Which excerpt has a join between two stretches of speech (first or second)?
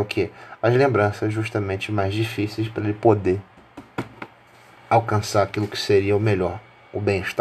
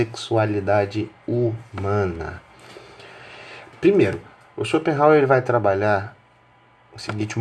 second